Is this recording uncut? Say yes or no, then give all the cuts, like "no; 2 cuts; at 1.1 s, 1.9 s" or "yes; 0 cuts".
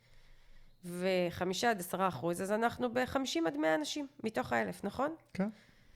yes; 0 cuts